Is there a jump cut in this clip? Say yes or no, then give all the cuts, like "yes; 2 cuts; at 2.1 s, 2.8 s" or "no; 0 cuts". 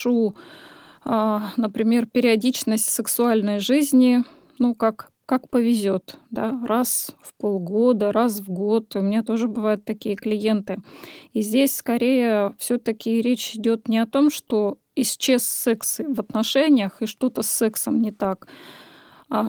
no; 0 cuts